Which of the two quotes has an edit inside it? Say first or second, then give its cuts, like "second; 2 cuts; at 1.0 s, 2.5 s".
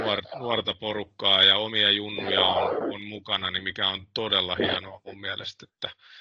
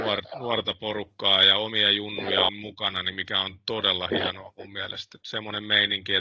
second; 2 cuts; at 2.5 s, 5.2 s